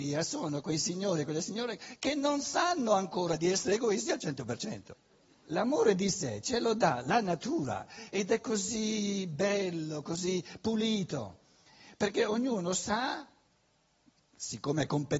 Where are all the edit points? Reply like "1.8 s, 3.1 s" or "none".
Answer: 5.5 s